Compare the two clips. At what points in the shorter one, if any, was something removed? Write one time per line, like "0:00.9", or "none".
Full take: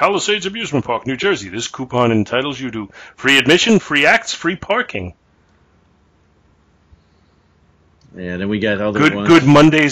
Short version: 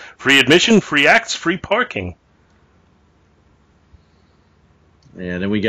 none

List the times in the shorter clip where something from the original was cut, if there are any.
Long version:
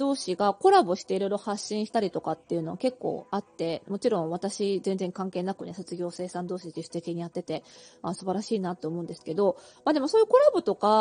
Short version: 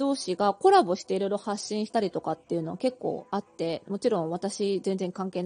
none

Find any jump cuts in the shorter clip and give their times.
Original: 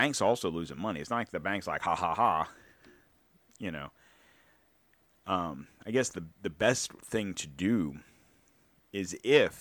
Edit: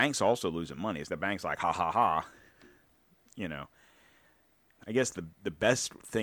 0:01.1
0:04.8

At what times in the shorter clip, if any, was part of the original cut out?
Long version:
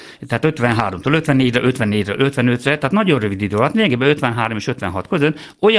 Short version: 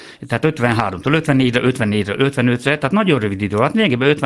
none

